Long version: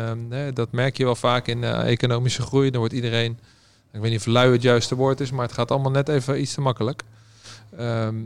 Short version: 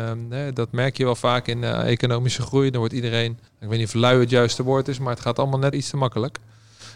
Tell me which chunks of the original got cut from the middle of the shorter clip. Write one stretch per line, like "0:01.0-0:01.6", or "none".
0:03.5-0:03.8
0:06.1-0:06.4